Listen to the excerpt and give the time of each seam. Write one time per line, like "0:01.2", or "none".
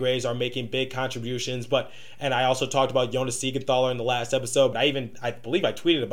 0:04.7